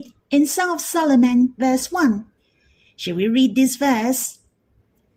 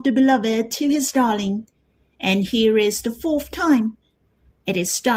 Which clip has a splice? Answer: first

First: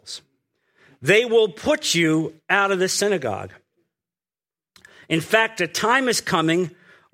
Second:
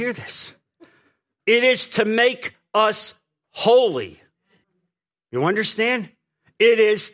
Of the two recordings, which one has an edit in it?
second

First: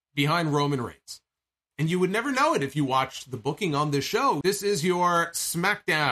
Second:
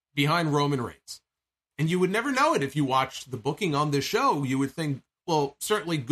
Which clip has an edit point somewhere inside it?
first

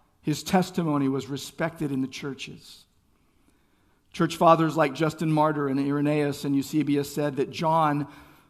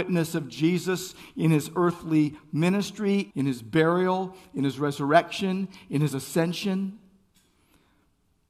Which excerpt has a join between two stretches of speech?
second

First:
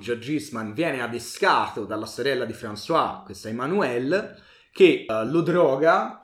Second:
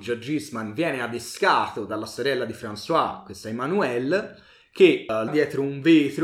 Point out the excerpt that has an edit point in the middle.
second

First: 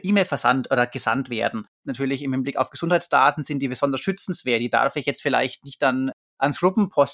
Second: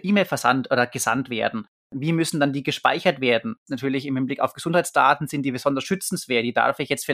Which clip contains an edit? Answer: first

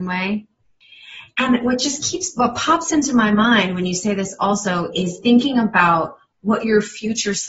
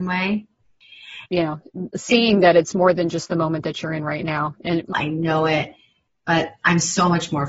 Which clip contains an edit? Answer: second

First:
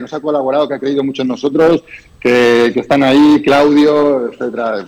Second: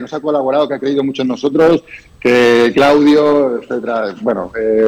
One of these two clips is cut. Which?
second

